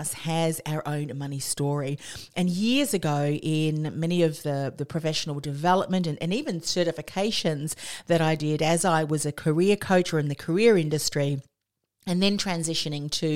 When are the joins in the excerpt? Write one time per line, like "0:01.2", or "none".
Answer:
none